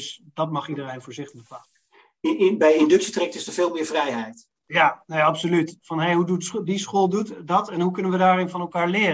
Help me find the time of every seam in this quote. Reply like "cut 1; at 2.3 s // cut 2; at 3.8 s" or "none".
cut 1; at 5.8 s

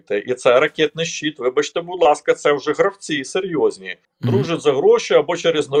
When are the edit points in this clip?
cut 1; at 4.0 s

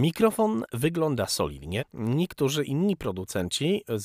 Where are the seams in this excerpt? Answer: cut 1; at 1.8 s

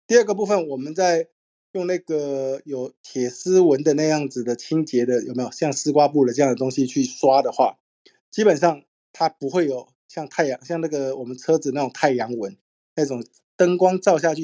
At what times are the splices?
none

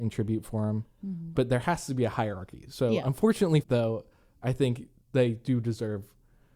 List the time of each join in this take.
cut 1; at 1.3 s // cut 2; at 3.6 s

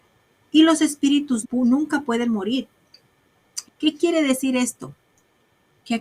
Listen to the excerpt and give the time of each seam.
cut 1; at 1.4 s // cut 2; at 3.6 s

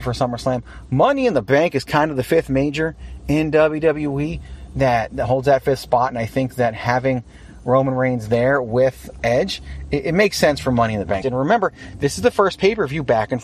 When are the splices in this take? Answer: cut 1; at 9.2 s // cut 2; at 11.2 s

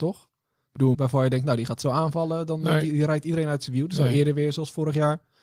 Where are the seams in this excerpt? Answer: cut 1; at 0.9 s

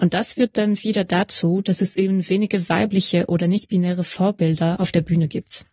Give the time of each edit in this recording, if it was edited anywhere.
none

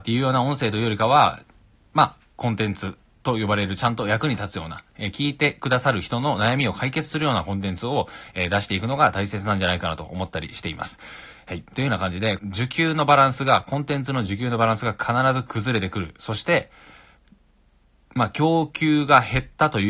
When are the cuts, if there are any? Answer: cut 1; at 12.4 s

